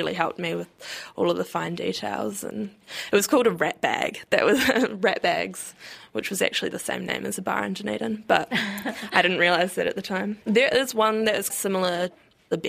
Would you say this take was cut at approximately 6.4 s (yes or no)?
no